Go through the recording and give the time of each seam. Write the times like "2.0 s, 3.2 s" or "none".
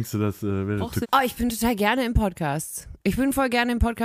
1.0 s